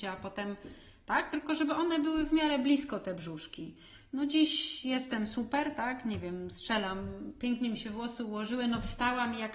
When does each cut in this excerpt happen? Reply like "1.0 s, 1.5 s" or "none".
none